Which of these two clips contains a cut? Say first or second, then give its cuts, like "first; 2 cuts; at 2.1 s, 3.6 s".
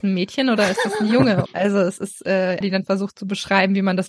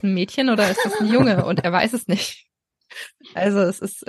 first; 2 cuts; at 1.5 s, 2.6 s